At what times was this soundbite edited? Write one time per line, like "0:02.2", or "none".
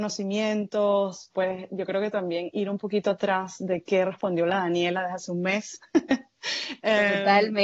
none